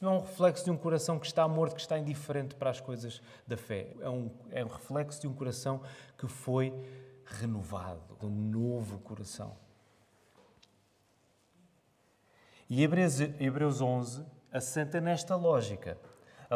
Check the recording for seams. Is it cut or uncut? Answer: cut